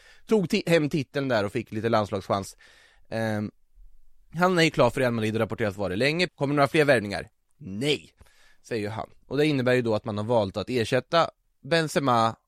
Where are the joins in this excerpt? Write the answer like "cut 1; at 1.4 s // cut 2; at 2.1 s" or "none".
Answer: cut 1; at 6.3 s